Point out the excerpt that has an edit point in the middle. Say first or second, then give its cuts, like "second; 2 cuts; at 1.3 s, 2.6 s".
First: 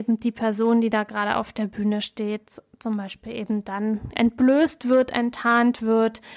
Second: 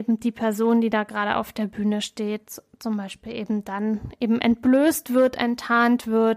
first; 1 cut; at 4.1 s